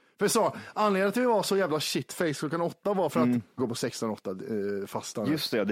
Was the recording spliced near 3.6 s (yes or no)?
yes